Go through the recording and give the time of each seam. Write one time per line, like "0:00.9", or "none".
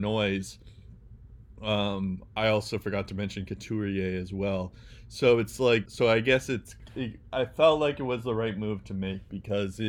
0:05.9